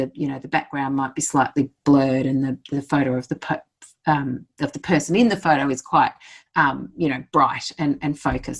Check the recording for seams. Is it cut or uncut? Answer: uncut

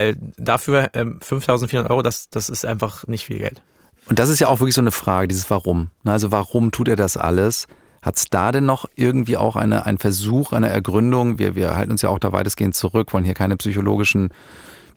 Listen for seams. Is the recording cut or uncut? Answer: uncut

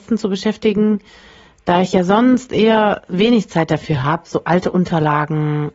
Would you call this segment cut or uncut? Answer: uncut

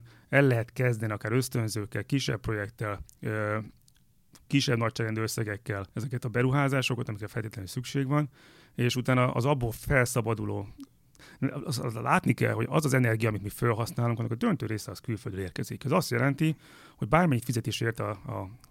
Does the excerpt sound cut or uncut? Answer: cut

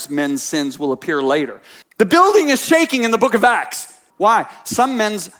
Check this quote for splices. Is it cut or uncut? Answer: cut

